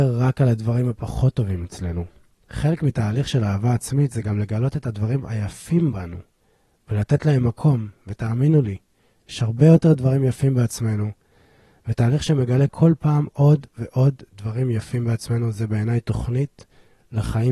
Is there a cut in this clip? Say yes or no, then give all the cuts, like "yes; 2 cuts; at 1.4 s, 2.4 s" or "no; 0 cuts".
no; 0 cuts